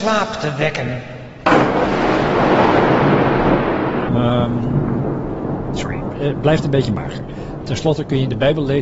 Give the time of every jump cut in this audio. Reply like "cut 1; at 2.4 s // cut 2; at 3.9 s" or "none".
cut 1; at 4.1 s